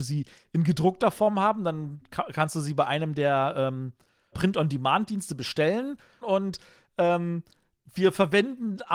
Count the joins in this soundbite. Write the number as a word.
two